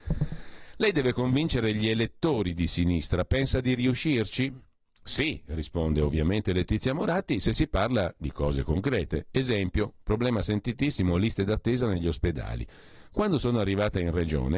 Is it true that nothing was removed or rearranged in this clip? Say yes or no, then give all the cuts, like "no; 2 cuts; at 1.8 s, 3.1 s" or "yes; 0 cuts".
yes; 0 cuts